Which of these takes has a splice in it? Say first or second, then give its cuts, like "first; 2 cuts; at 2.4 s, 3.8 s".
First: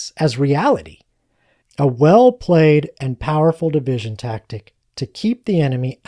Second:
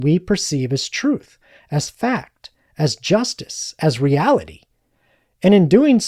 first; 1 cut; at 1.6 s